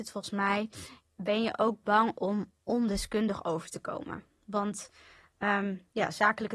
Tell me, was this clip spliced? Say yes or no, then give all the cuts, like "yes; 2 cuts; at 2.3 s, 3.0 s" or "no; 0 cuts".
yes; 1 cut; at 1.0 s